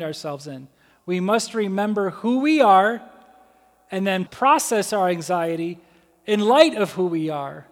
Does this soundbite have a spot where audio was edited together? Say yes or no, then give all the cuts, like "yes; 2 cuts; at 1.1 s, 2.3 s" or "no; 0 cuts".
yes; 2 cuts; at 0.9 s, 4.3 s